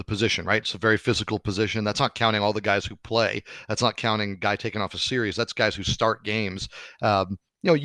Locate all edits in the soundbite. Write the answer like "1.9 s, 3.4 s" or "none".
none